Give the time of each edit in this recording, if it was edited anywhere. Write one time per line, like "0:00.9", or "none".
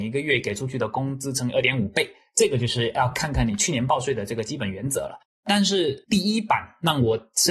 none

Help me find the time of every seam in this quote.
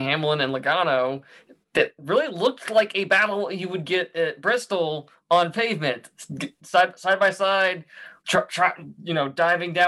0:08.2

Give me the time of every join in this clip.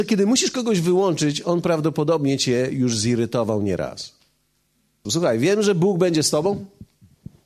0:05.1

